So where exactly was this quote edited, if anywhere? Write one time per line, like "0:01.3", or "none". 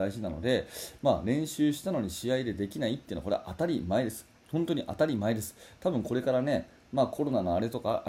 none